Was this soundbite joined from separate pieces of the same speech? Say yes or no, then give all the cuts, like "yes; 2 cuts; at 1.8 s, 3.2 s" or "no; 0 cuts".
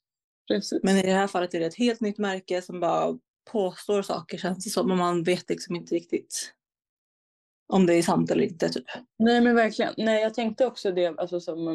no; 0 cuts